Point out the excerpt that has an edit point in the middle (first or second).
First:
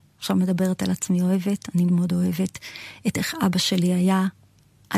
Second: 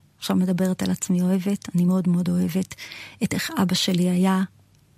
first